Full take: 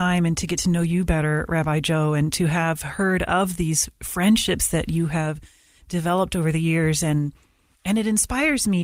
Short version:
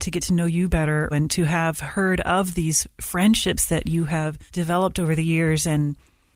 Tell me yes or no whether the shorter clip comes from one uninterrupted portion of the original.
no